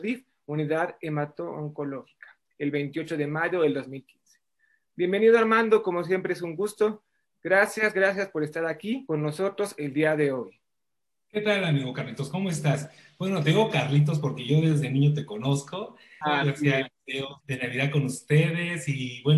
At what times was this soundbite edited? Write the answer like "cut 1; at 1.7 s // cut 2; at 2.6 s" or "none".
cut 1; at 16.2 s // cut 2; at 17.4 s